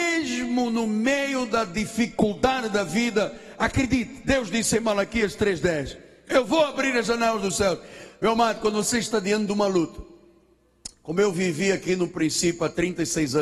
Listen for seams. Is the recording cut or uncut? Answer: cut